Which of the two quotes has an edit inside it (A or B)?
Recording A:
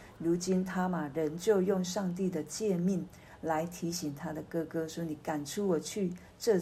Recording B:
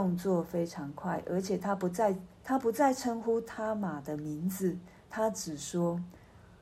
B